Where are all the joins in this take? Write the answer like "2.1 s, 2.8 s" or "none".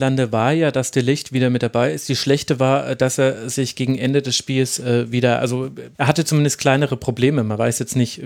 5.9 s